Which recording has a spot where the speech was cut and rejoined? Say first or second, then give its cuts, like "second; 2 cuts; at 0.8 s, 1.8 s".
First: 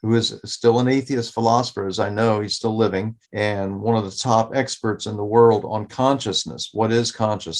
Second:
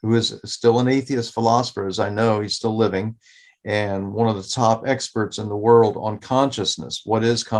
first; 1 cut; at 3.2 s